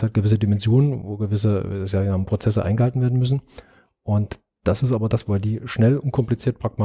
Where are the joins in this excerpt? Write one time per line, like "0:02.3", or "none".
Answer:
0:05.3